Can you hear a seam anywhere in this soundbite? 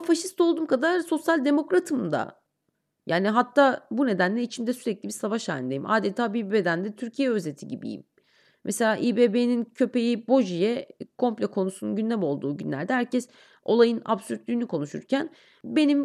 no; 0 cuts

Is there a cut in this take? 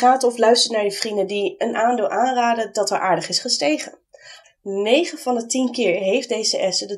yes; 1 cut; at 4.4 s

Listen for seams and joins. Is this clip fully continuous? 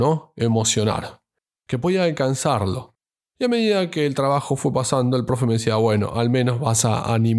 yes; 0 cuts

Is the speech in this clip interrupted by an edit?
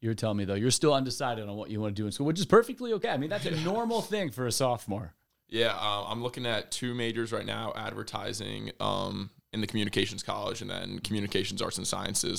no; 0 cuts

